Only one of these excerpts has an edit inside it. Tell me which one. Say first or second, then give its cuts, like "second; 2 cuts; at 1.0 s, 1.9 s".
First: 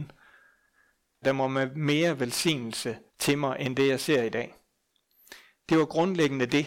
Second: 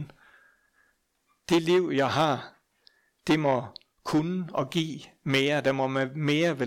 first; 2 cuts; at 1.2 s, 3.1 s